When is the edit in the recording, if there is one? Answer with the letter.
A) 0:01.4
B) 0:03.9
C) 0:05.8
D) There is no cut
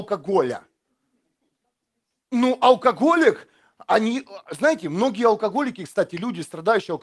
D